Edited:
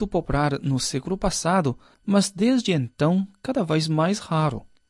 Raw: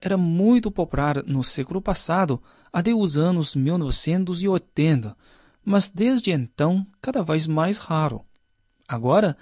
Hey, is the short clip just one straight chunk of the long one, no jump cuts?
no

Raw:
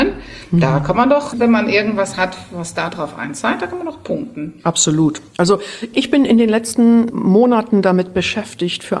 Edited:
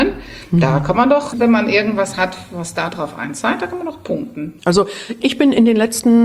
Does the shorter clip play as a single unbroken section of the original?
no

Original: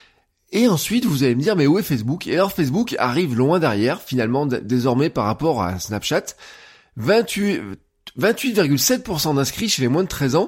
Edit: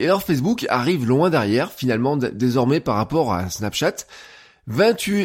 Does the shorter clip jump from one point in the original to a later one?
no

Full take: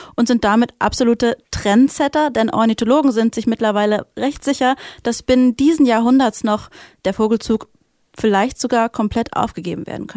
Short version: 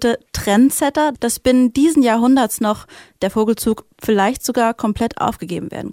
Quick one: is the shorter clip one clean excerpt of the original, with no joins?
no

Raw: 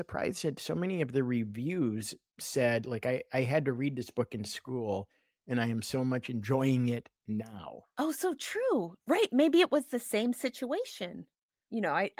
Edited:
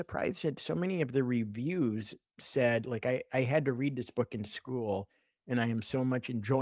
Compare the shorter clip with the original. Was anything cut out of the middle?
no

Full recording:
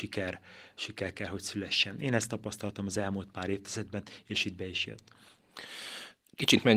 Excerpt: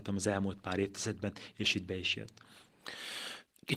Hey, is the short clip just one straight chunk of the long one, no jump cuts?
yes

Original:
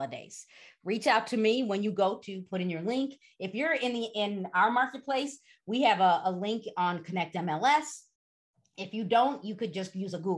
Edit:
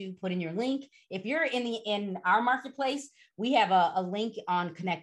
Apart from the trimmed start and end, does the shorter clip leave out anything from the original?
no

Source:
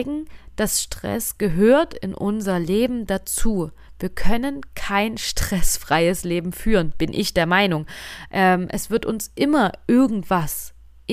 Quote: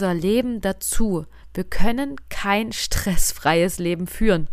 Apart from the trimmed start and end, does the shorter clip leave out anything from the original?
no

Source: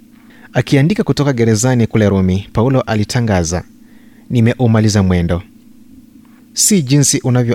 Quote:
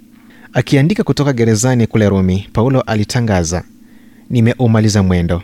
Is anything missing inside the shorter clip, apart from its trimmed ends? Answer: no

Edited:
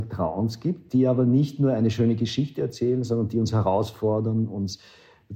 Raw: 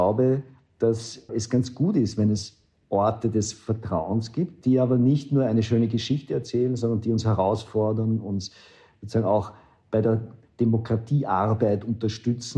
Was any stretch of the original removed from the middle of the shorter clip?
no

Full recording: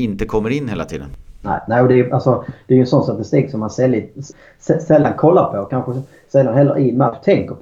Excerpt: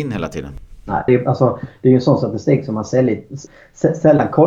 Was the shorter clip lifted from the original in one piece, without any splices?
no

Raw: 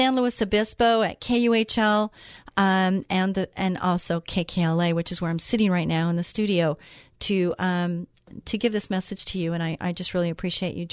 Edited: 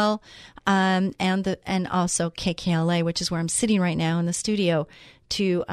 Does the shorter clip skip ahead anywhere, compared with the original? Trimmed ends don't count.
no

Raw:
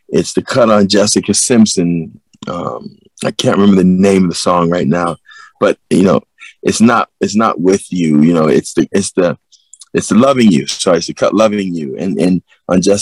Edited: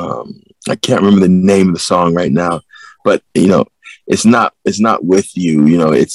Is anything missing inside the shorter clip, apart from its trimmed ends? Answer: no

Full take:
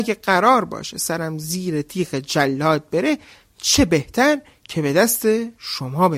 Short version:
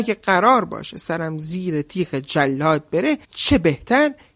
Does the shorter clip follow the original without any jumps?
no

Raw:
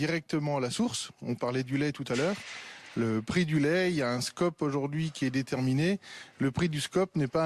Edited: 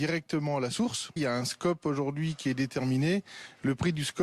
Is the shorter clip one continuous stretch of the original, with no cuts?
no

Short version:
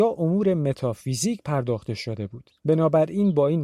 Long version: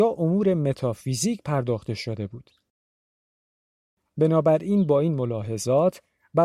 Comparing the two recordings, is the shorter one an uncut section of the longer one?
no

